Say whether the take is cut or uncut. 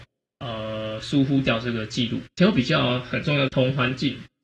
cut